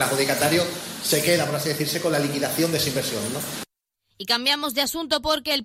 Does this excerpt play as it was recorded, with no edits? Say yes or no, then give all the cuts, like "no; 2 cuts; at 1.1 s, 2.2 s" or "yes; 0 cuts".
yes; 0 cuts